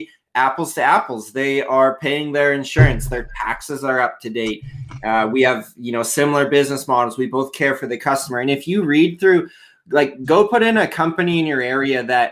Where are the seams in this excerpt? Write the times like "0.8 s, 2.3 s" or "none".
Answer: none